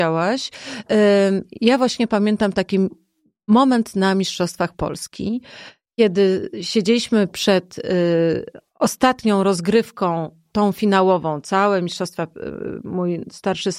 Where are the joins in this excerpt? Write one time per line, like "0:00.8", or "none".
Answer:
none